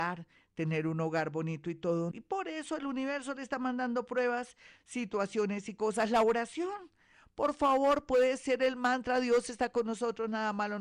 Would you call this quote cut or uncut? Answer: cut